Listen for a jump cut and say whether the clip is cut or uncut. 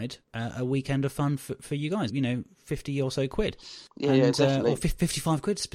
cut